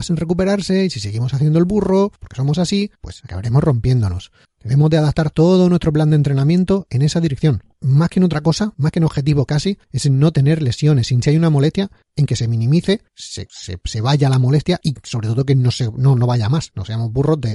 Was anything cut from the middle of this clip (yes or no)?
yes